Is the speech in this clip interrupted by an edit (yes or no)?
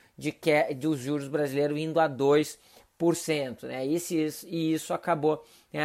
no